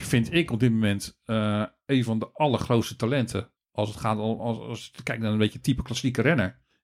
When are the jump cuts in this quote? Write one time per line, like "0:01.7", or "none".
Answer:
none

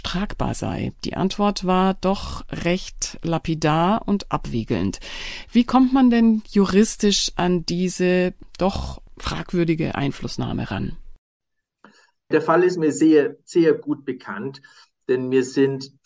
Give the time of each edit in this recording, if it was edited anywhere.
none

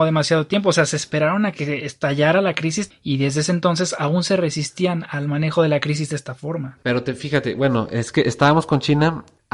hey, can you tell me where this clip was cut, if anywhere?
0:02.9
0:06.8

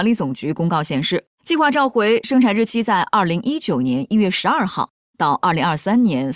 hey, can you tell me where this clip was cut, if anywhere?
0:01.3

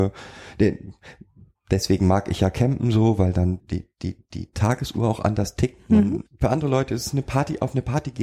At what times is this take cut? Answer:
0:03.6
0:06.3

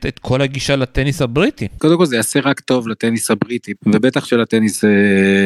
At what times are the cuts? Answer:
0:01.8
0:03.7

